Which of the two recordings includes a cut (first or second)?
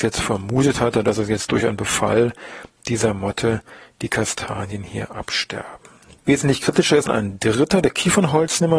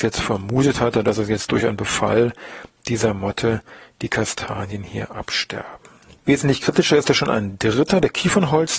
first